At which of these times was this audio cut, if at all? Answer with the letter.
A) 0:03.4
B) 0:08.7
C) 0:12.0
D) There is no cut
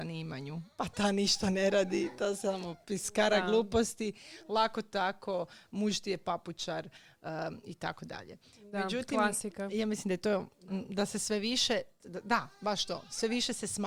C